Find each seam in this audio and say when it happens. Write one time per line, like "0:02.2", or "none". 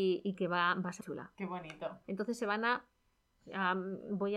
0:01.0
0:02.0